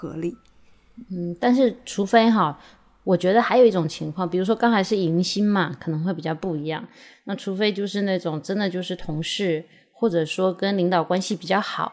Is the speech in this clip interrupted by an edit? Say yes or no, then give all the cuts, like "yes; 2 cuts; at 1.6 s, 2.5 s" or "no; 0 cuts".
no; 0 cuts